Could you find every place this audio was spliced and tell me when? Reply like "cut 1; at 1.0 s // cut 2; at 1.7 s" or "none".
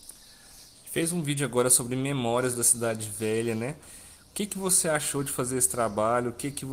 none

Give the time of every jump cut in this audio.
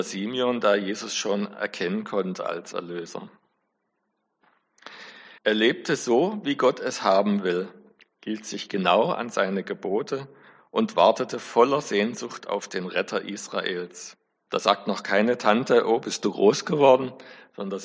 cut 1; at 5.4 s // cut 2; at 14.5 s

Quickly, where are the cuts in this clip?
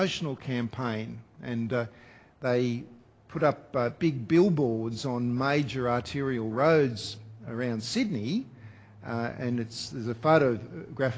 none

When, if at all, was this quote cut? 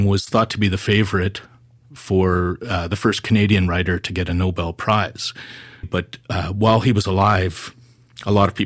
cut 1; at 5.8 s

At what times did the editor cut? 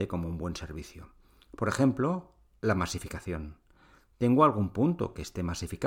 none

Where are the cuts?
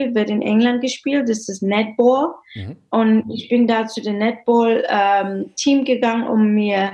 none

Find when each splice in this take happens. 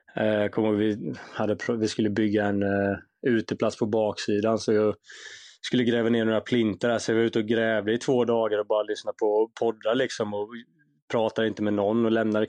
none

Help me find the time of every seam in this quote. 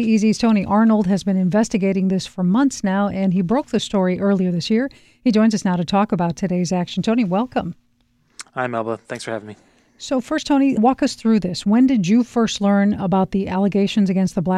cut 1; at 10.8 s

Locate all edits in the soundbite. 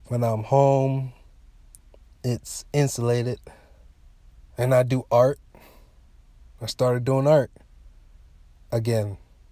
cut 1; at 4.5 s

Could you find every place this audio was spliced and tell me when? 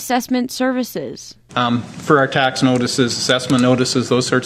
cut 1; at 1.5 s

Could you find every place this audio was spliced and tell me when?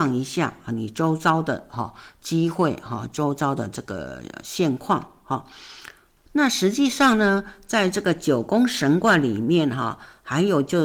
cut 1; at 6.3 s

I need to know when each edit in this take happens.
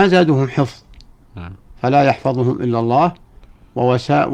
none

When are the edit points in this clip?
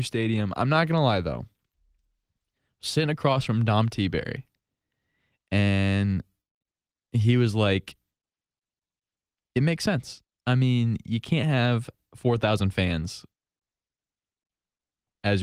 none

